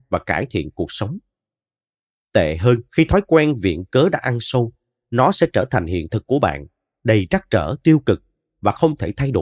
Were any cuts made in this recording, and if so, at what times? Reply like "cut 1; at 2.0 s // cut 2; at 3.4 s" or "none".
cut 1; at 2.9 s